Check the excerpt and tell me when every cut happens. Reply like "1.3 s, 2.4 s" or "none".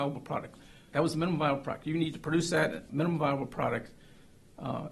0.9 s, 2.9 s